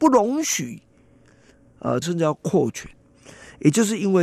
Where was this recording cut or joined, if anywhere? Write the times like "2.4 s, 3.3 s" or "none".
2.0 s